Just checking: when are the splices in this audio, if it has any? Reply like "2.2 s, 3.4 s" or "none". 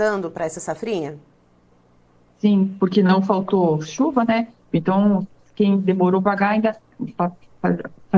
4.7 s, 6.2 s